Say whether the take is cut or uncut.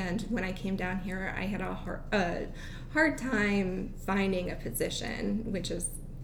uncut